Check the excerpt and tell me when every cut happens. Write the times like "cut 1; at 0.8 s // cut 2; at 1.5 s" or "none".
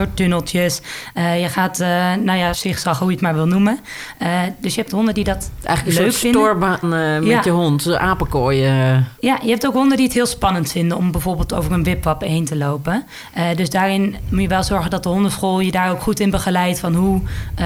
cut 1; at 2.5 s // cut 2; at 6.8 s